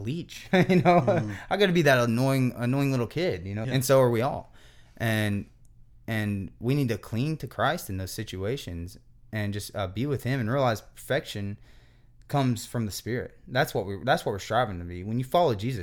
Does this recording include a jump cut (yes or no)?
yes